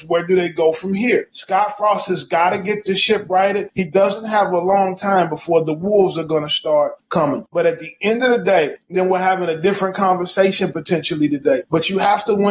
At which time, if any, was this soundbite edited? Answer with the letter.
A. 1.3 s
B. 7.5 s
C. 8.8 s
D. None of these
C